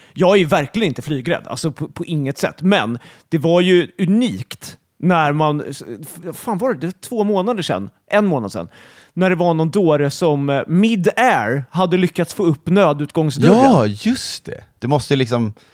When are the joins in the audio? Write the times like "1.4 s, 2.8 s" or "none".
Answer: 14.8 s